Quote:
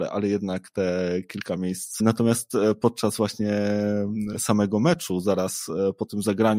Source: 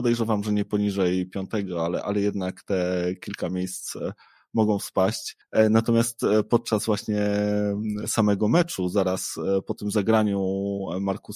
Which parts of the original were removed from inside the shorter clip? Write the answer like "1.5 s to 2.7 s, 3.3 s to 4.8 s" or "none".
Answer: 3.9 s to 5.7 s